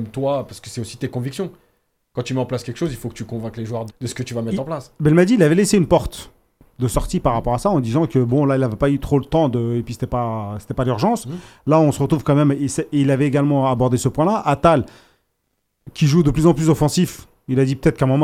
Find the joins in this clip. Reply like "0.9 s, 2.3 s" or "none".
3.9 s